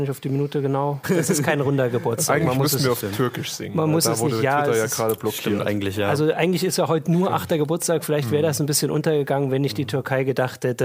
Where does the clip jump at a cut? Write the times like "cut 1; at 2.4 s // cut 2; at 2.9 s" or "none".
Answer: cut 1; at 1.0 s